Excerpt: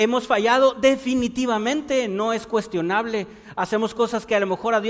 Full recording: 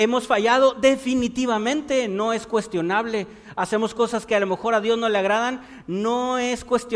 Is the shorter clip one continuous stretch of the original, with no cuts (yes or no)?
yes